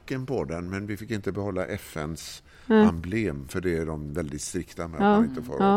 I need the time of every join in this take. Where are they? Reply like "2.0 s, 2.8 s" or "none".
none